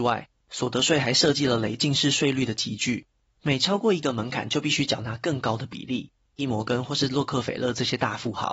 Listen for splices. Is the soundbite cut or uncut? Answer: cut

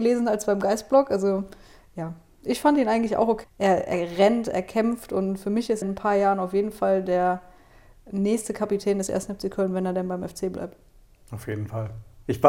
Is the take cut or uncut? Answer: cut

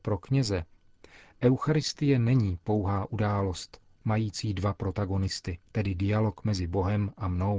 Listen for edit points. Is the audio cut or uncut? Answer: cut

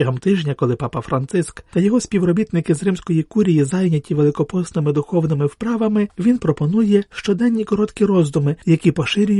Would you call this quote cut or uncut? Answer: uncut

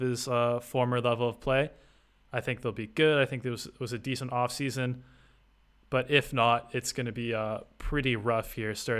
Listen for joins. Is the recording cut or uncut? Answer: uncut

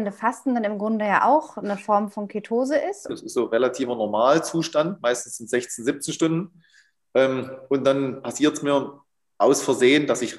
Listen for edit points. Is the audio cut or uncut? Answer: cut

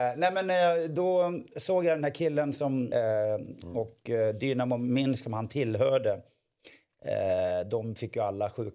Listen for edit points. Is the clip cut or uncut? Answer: cut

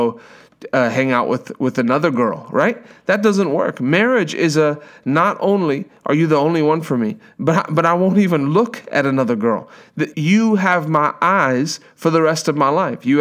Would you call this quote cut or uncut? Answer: cut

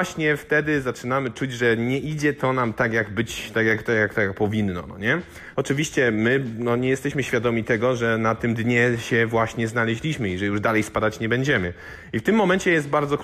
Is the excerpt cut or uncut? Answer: cut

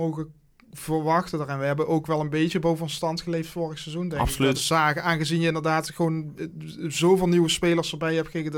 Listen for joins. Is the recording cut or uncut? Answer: cut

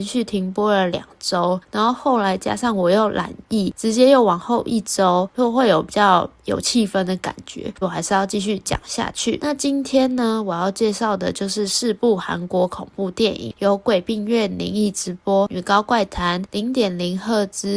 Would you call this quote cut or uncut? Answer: cut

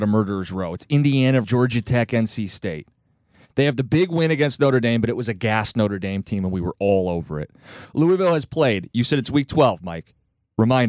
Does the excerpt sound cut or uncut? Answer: cut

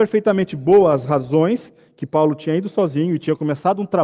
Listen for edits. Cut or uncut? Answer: uncut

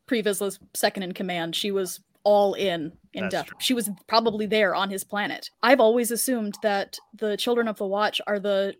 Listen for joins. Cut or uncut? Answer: cut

